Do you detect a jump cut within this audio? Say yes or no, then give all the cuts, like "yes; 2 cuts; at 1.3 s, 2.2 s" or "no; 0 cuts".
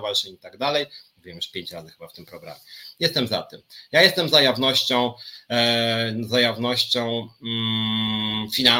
yes; 1 cut; at 1.1 s